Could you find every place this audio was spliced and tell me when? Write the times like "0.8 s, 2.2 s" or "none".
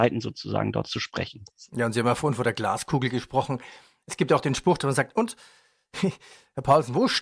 none

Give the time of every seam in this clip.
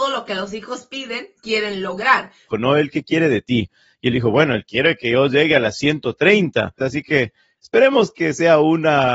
2.5 s, 6.8 s

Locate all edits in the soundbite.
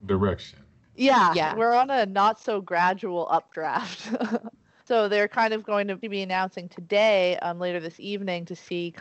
6.0 s

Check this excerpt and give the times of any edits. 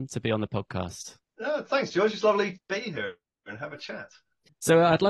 2.6 s

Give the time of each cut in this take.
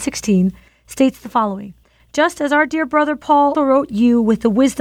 3.5 s

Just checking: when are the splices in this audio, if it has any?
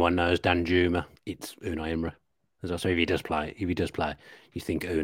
1.2 s

